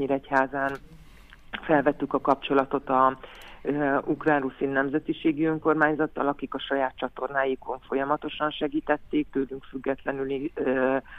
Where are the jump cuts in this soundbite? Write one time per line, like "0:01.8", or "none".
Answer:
none